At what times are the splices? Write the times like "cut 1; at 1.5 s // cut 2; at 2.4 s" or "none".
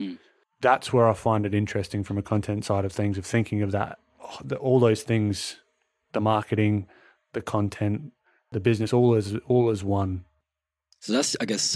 none